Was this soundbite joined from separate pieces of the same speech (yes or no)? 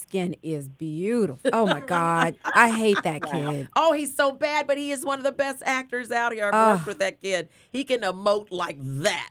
yes